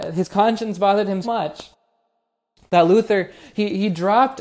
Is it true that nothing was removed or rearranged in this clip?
no; 1 cut; at 1.2 s

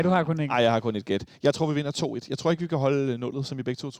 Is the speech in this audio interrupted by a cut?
no; 0 cuts

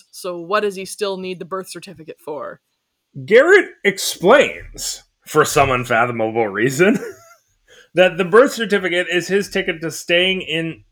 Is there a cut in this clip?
no; 0 cuts

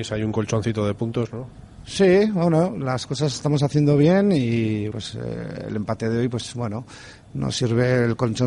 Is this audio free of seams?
no; 1 cut; at 4.9 s

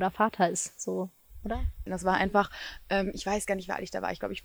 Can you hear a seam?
yes; 1 cut; at 1.9 s

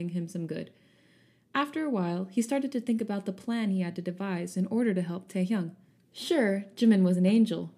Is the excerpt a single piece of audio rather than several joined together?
yes; 0 cuts

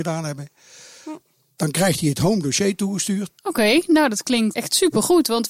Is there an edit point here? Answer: yes; 2 cuts; at 3.4 s, 4.5 s

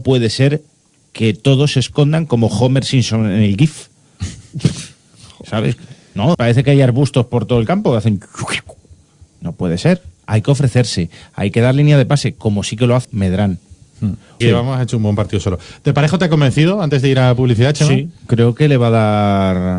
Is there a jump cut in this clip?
yes; 3 cuts; at 6.3 s, 13.0 s, 14.4 s

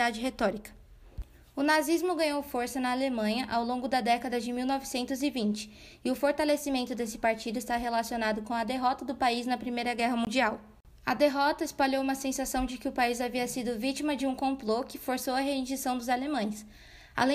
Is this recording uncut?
yes; 0 cuts

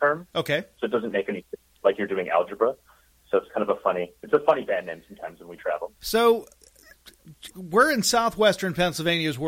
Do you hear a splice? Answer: yes; 2 cuts; at 6.0 s, 7.5 s

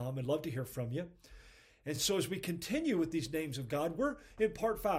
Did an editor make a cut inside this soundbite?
no; 0 cuts

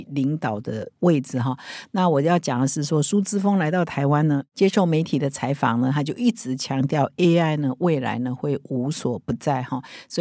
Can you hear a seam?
no; 0 cuts

